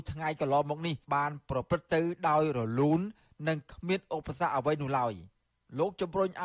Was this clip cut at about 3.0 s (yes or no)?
no